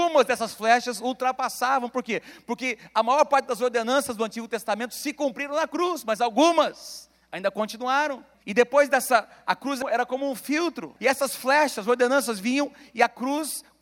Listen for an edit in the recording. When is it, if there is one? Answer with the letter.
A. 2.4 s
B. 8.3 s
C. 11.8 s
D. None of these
B